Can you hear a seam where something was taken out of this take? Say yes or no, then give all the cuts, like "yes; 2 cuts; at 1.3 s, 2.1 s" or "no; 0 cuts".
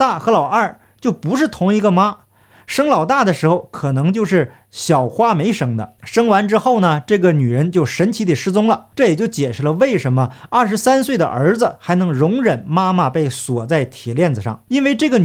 yes; 1 cut; at 8.9 s